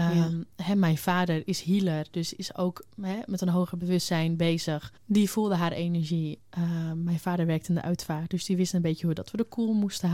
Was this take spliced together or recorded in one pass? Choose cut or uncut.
cut